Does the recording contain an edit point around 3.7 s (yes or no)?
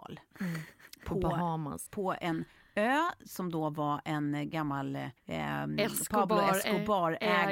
no